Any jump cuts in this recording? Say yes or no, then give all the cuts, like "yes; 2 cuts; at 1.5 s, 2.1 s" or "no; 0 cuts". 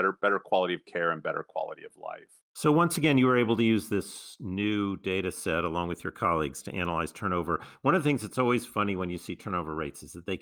yes; 1 cut; at 2.4 s